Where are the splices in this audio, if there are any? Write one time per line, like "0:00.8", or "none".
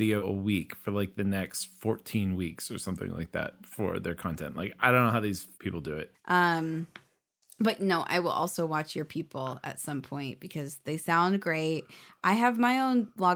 0:06.1